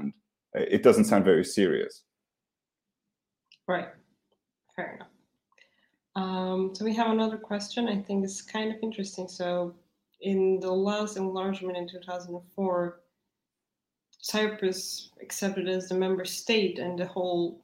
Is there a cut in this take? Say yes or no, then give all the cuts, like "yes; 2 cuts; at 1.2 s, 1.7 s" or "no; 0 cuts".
no; 0 cuts